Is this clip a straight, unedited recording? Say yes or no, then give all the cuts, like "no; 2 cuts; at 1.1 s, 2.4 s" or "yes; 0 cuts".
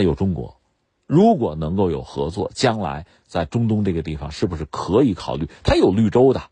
yes; 0 cuts